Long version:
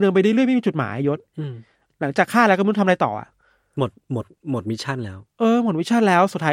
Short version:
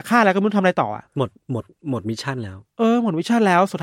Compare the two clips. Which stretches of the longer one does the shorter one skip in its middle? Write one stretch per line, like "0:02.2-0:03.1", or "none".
0:03.3-0:03.7